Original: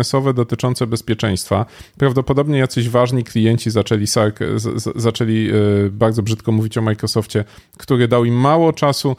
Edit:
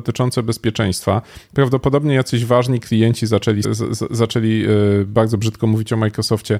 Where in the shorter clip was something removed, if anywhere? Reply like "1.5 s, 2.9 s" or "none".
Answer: 3.6 s

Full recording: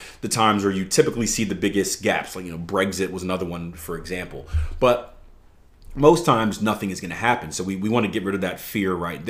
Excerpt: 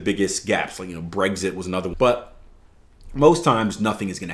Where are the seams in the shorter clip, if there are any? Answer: 1.9 s

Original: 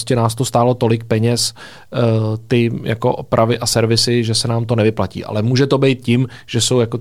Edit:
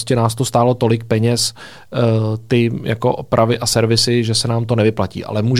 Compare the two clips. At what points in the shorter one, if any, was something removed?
none

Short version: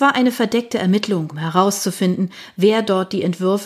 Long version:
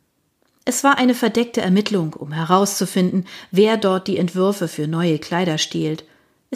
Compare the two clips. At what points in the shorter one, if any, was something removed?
1.3 s

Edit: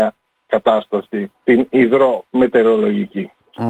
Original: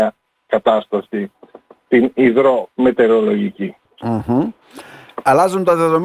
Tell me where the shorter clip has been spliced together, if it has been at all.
1.4 s

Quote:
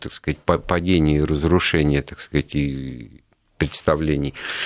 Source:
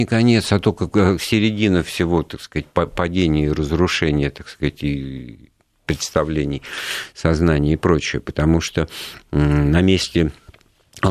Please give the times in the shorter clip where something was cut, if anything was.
none

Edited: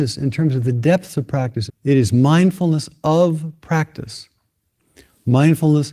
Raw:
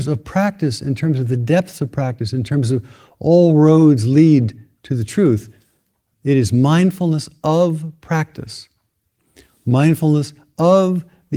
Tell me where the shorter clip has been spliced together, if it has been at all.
1.7 s

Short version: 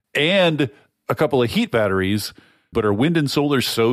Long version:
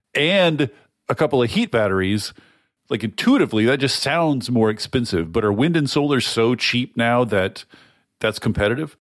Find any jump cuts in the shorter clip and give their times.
2.7 s

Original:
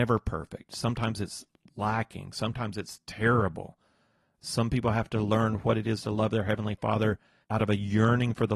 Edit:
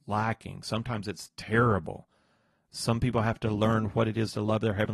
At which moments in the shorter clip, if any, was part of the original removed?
none

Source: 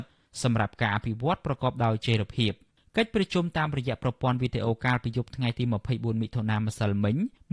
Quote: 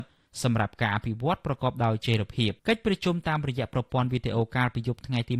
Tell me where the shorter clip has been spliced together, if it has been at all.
2.6 s

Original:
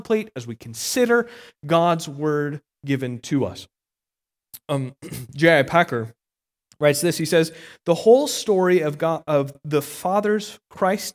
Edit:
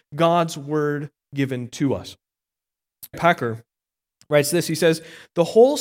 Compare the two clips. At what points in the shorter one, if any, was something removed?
3.1 s

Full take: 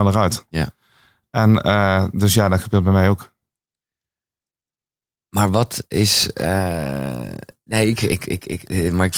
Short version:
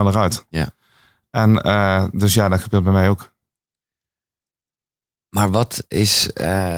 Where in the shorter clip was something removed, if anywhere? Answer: none

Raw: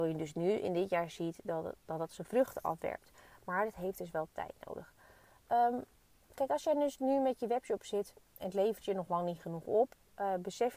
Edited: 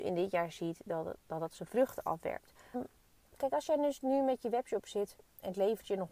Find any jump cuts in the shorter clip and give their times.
2.7 s

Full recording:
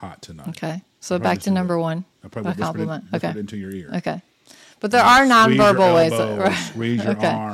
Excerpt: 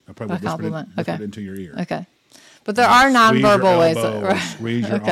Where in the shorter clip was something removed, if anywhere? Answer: none

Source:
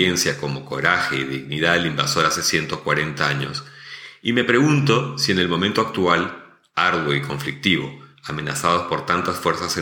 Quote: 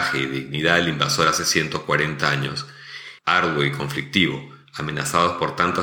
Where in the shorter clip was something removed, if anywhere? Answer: 3.2 s

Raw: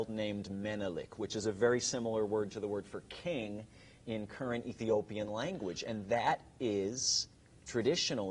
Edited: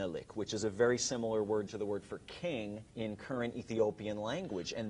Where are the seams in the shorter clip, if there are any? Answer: 2.9 s

